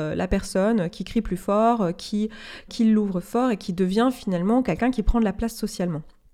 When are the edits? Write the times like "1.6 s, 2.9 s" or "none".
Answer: 2.7 s